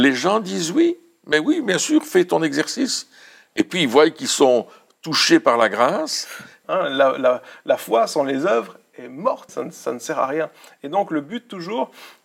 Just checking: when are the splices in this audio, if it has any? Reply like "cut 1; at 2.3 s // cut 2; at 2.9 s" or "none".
cut 1; at 6.6 s // cut 2; at 9.5 s